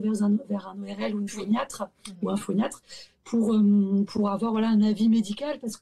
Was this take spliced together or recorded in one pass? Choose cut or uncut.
uncut